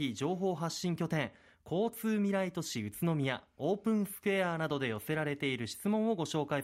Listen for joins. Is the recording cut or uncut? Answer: uncut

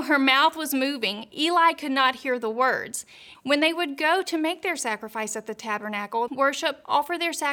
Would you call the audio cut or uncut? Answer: cut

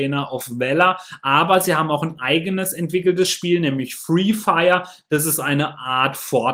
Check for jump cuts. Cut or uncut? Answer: uncut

